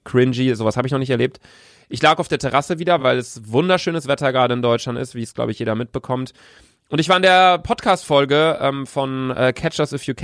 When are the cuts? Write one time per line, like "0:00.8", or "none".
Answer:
none